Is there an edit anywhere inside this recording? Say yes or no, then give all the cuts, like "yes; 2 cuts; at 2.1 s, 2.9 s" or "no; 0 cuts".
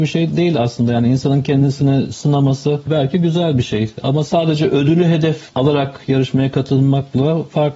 no; 0 cuts